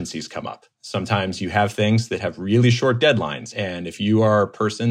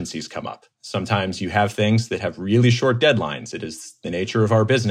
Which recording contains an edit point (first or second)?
first